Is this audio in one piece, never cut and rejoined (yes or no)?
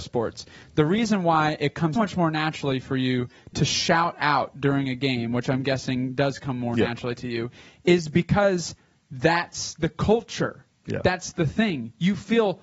no